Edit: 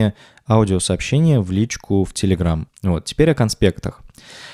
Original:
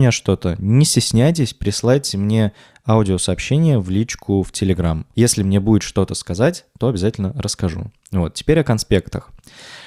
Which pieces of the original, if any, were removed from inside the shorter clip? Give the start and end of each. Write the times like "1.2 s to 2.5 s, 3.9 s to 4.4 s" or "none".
5.1 s to 8.0 s

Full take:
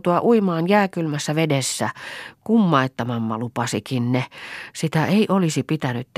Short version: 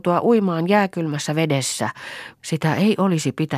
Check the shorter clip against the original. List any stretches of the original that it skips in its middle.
2.4 s to 4.7 s

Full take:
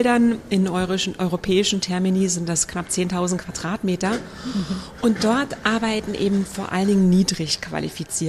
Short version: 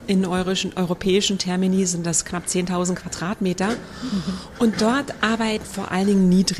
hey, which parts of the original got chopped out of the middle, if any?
6.1 s to 6.4 s

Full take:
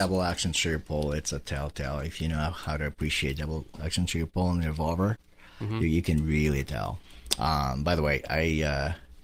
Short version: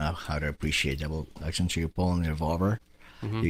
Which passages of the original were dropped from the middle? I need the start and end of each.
none

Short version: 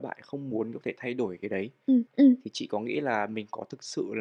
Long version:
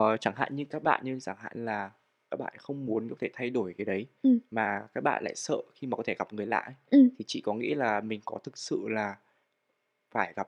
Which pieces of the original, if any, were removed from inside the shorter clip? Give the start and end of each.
4.4 s to 6.8 s

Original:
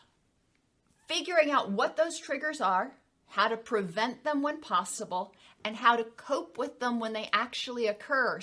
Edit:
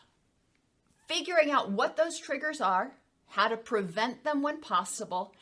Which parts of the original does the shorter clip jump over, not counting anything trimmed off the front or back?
none

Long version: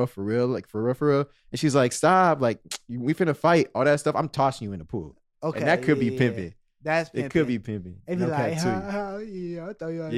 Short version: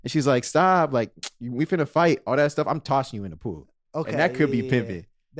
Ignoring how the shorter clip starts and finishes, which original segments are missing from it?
none

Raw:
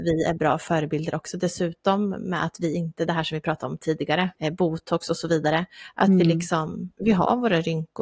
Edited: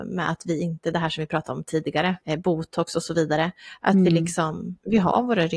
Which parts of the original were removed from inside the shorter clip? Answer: none

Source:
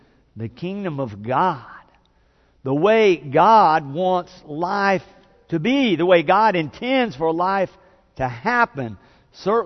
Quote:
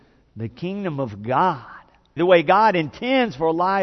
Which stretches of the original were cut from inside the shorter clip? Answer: 2.2 s to 6.0 s

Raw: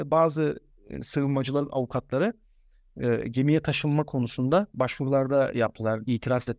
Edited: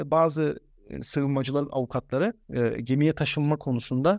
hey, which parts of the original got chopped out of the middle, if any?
2.4 s to 2.9 s

